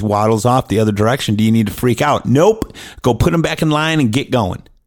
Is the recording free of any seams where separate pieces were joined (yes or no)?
yes